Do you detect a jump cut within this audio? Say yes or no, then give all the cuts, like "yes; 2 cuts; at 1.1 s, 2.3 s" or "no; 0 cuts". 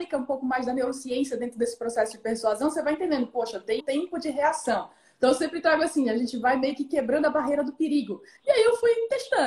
yes; 2 cuts; at 3.8 s, 8.4 s